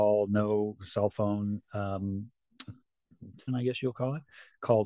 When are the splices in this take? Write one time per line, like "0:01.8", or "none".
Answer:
0:03.5